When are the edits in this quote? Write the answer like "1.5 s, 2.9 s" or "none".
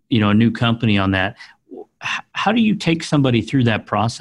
none

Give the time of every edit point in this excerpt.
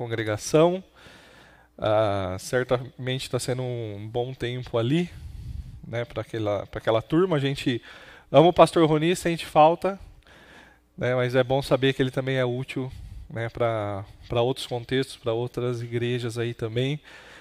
none

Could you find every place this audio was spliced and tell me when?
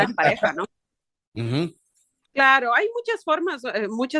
2.2 s

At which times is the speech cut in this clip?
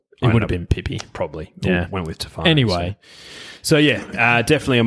none

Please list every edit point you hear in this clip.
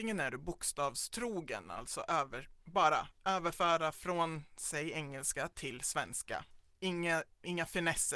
none

